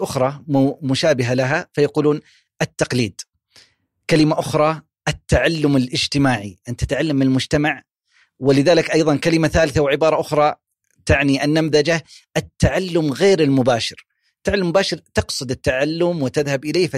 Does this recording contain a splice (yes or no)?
no